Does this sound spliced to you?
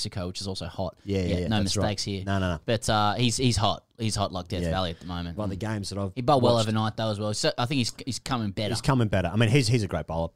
yes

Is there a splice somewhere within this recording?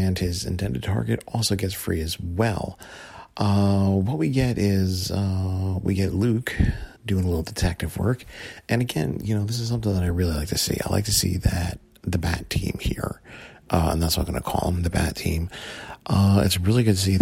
yes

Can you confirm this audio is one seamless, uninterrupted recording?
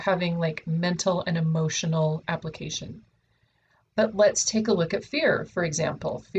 yes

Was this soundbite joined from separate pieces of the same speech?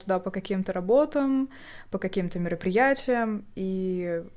no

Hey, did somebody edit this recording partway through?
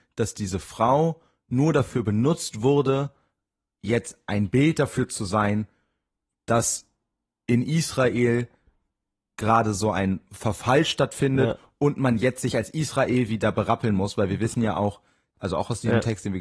yes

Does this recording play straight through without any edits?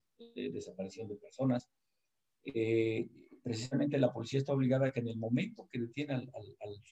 yes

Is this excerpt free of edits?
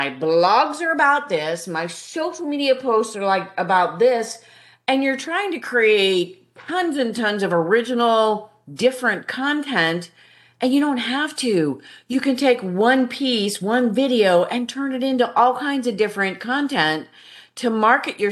yes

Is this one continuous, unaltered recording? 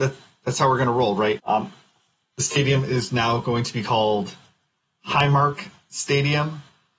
no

